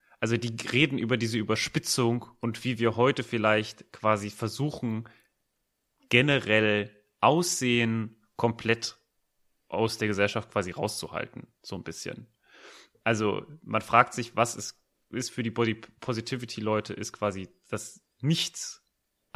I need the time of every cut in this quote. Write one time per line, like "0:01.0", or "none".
none